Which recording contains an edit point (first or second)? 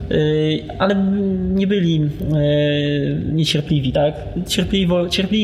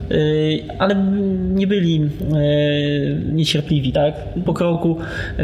second